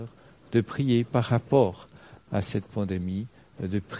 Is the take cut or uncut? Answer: cut